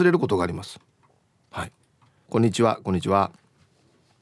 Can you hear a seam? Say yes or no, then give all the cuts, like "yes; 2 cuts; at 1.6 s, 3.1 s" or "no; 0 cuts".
yes; 1 cut; at 2.3 s